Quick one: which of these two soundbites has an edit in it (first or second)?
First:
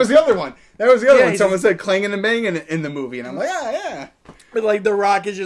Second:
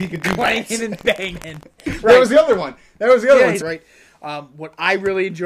second